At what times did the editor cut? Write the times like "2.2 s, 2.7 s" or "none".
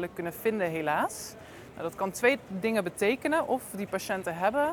none